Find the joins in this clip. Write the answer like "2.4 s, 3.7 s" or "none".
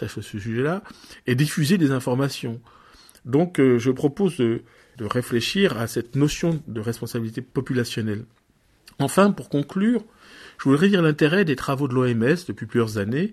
none